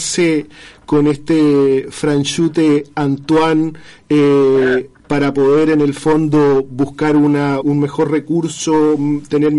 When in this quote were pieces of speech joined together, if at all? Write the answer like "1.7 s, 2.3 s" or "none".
5.0 s, 7.6 s